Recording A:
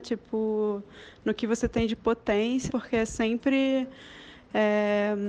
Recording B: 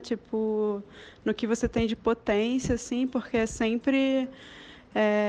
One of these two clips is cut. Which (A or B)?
A